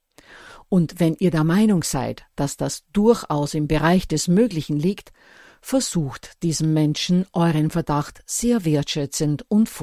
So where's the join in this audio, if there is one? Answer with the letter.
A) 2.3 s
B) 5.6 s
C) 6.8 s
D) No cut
D